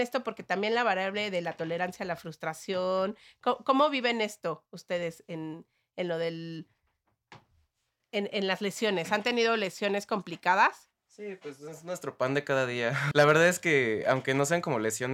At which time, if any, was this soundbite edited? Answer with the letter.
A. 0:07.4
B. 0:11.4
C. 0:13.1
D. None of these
C